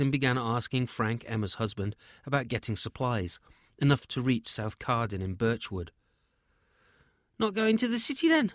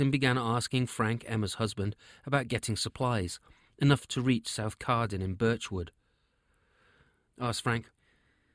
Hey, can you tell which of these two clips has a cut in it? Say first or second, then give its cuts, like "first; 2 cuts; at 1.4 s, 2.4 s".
second; 1 cut; at 7.3 s